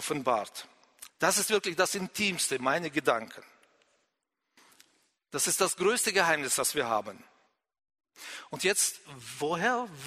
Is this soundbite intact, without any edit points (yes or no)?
no